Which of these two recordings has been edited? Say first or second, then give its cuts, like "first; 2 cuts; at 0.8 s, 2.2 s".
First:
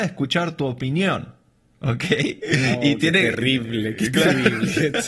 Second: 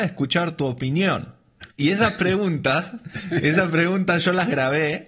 second; 1 cut; at 1.6 s